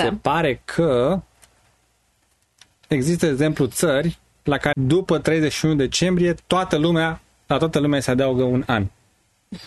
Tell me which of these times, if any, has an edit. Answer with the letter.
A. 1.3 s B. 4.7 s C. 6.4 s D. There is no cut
B